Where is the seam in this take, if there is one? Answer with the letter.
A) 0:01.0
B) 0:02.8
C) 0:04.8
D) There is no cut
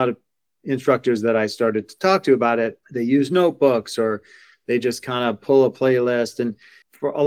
B